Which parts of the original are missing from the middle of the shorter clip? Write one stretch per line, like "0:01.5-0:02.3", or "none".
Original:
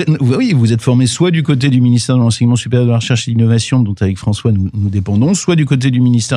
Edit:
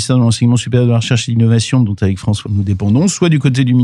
0:04.4-0:04.7